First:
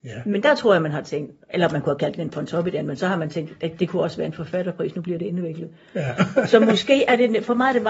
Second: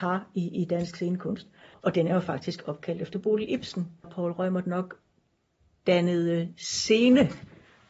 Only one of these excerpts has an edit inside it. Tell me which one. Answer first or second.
second